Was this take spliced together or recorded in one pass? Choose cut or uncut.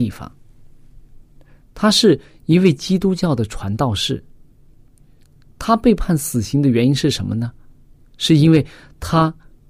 uncut